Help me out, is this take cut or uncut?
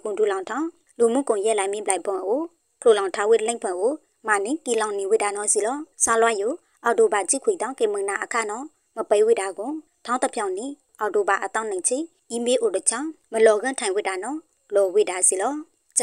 cut